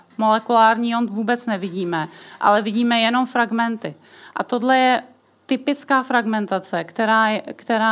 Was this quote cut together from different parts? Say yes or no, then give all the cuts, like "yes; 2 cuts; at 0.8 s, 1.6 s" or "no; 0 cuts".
no; 0 cuts